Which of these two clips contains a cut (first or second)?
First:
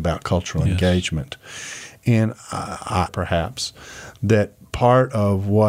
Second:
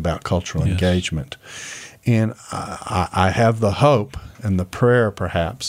first